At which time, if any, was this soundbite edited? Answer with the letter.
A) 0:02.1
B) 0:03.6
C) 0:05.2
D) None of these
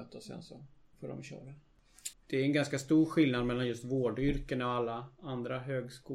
A